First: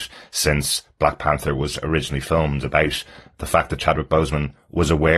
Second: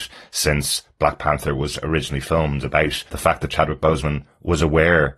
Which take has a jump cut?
second; 1 cut; at 3.1 s

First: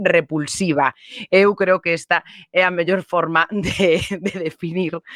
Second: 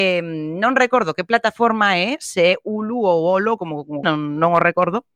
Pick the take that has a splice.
second; 1 cut; at 4.0 s

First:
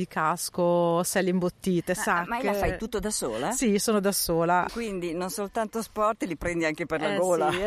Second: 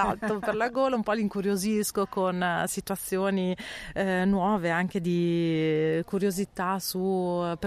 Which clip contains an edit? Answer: first; 1 cut; at 4.7 s

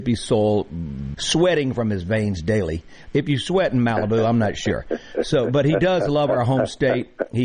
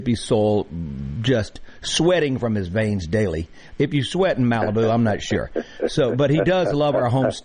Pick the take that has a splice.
first; 1 cut; at 1.1 s

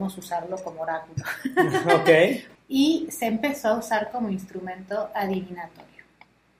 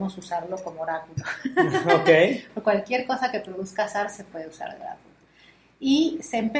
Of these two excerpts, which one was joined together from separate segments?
first; 1 cut; at 2.6 s

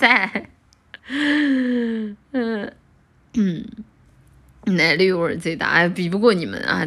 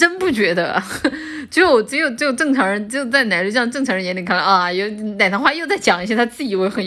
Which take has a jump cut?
first; 1 cut; at 1.0 s

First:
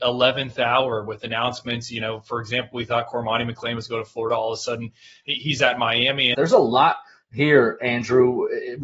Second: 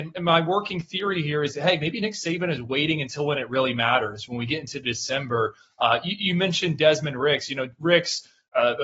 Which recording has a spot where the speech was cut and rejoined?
first; 1 cut; at 6.3 s

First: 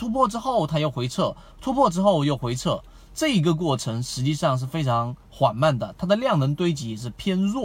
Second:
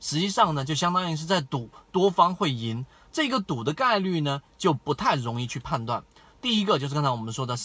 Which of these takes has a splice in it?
second; 1 cut; at 6.3 s

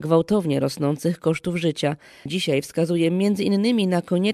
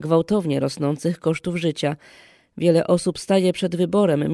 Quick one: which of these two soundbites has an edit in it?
first; 1 cut; at 2.2 s

